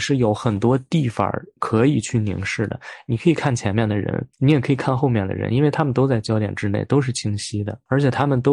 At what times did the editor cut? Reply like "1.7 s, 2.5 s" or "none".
4.3 s